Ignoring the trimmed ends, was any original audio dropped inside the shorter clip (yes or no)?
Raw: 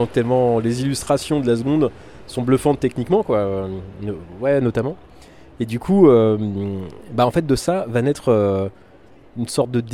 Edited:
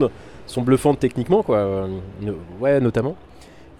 no